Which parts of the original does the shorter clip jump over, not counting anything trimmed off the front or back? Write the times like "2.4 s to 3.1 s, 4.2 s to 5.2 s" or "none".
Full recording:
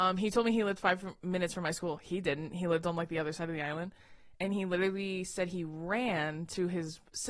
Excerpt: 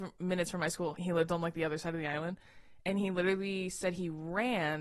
2.0 s to 2.5 s